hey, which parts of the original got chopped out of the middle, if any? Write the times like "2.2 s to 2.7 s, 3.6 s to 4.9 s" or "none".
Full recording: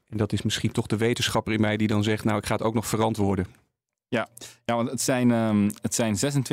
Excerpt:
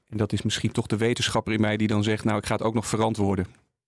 none

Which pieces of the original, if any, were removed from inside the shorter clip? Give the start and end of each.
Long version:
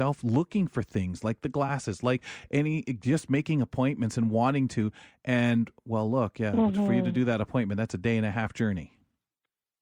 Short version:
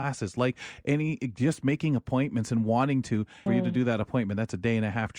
5.1 s to 6.9 s

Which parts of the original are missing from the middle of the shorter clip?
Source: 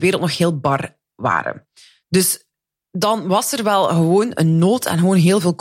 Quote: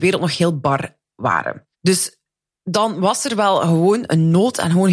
1.7 s to 2.0 s

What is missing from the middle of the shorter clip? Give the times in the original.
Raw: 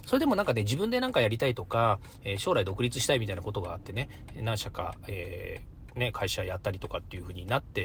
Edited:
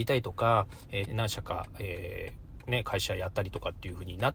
2.4 s to 4.3 s

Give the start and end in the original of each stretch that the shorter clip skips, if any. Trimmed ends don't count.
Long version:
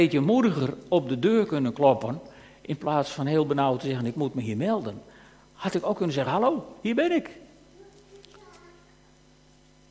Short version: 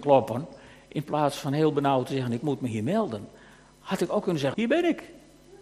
6.3 s to 6.8 s

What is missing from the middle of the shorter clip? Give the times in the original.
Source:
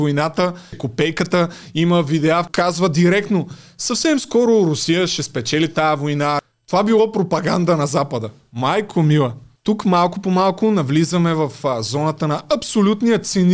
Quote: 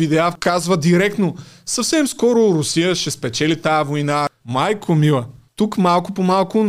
6.5 s to 8.5 s

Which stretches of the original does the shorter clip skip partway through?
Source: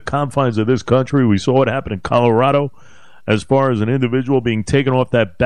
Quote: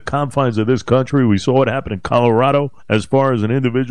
2.8 s to 3.2 s

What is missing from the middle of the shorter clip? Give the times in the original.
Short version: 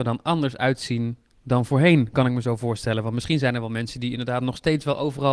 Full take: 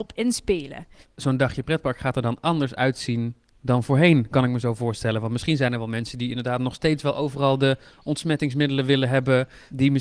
none

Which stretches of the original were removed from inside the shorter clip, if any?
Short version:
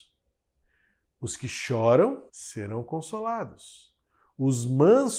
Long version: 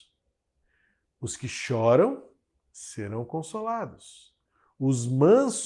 2.3 s to 2.7 s

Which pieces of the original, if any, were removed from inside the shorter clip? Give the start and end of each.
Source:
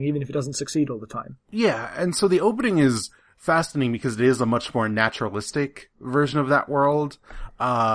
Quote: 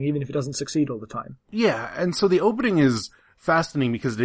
none

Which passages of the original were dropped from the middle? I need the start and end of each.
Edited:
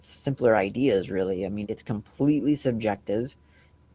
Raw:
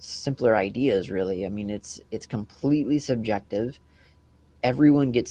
1.6 s to 2.1 s

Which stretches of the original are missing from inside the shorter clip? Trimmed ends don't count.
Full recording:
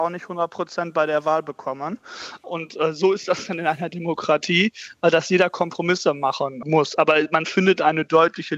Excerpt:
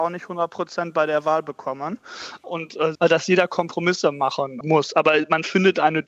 2.9 s to 5.0 s

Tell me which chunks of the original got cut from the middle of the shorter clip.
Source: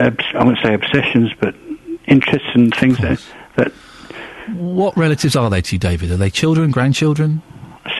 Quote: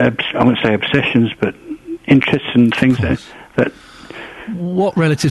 none

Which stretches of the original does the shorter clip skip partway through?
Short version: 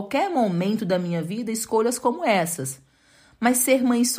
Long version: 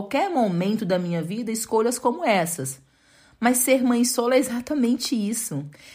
none

